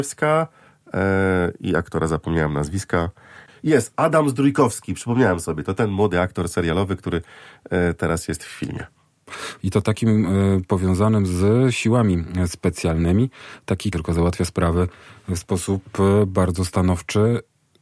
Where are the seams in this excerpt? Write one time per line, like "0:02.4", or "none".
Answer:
0:09.6
0:13.9